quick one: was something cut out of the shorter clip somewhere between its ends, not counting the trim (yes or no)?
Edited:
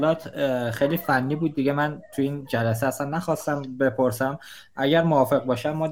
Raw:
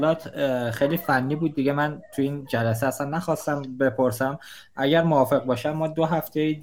no